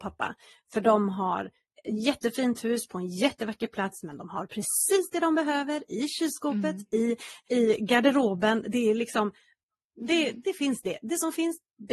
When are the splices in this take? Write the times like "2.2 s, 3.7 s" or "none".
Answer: 7.4 s

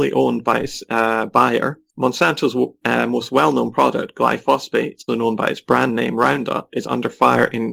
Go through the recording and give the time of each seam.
1.9 s, 5.1 s

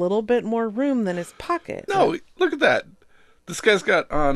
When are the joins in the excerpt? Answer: 1.9 s

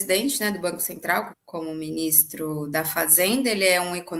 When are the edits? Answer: 1.3 s

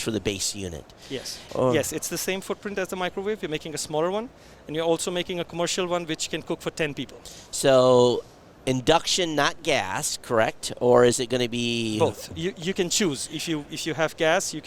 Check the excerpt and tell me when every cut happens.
1.5 s

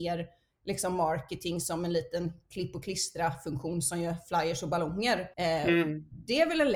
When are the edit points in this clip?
5.3 s

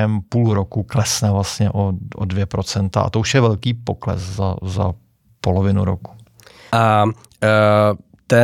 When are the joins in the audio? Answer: 6.7 s

